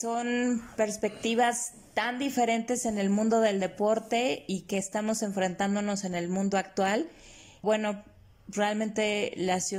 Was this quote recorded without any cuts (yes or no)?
no